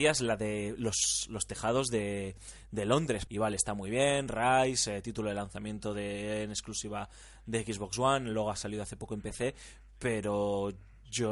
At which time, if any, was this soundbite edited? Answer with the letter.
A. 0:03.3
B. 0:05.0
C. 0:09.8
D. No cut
A